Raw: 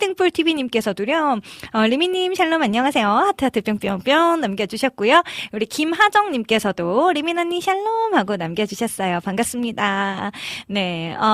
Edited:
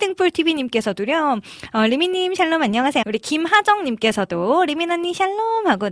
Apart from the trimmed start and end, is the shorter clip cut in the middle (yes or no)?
yes